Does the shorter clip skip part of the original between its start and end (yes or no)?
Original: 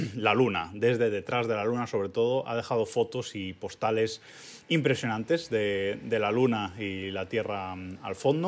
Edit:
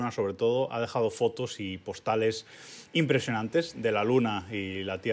yes